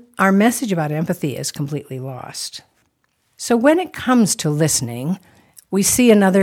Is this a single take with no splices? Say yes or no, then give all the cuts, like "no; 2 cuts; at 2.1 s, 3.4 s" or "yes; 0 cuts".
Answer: yes; 0 cuts